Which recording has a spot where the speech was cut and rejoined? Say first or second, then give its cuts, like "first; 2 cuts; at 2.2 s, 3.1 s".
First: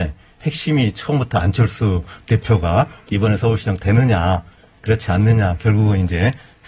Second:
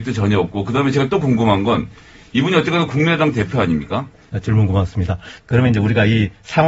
second; 2 cuts; at 4.3 s, 5.4 s